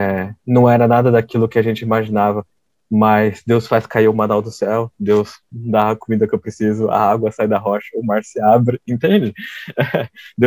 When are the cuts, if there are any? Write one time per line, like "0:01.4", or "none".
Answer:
none